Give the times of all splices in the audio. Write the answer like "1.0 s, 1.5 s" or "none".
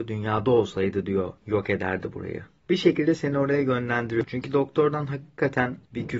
4.2 s